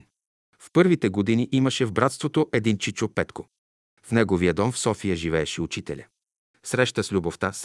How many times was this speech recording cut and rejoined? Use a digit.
1